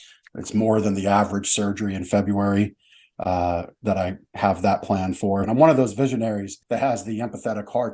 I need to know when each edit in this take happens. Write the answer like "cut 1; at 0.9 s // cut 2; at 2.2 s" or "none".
cut 1; at 5.4 s // cut 2; at 6.6 s